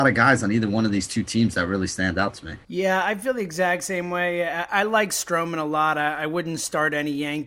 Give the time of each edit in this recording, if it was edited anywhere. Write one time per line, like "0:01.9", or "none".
none